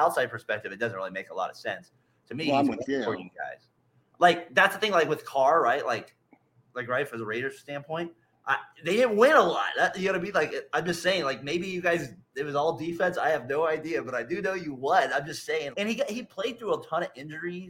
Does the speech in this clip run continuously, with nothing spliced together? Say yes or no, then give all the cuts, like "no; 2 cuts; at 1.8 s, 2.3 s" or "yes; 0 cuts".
no; 1 cut; at 15.7 s